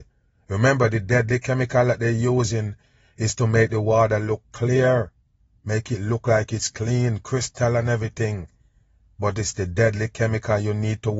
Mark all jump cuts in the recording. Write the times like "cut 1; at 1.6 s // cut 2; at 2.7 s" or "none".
none